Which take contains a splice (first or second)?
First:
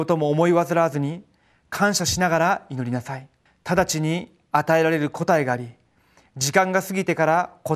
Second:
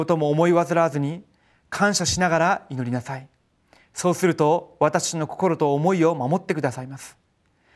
first